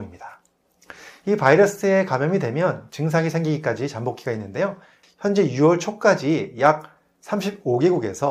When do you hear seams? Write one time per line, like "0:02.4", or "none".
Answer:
0:05.0